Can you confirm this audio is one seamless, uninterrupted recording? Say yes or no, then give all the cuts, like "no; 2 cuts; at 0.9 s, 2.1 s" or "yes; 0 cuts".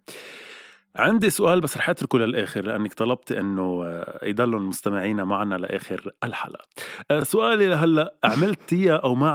yes; 0 cuts